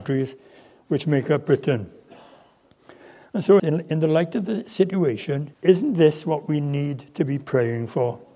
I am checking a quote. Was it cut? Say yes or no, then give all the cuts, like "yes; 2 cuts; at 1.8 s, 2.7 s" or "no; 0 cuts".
yes; 2 cuts; at 3.6 s, 5.5 s